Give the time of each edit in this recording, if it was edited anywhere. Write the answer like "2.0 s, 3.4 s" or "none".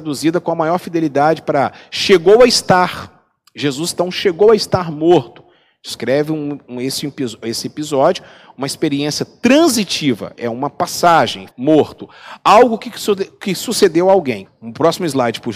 11.5 s, 14.4 s